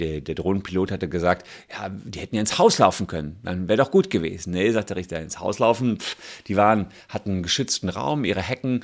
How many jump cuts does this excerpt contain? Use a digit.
0